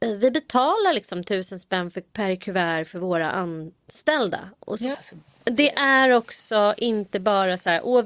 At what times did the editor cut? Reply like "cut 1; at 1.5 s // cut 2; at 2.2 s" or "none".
cut 1; at 2.1 s // cut 2; at 4.9 s